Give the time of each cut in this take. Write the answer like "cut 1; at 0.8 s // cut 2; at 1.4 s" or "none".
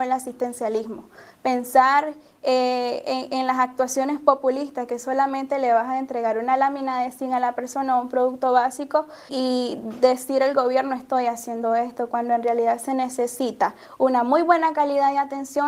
cut 1; at 9.3 s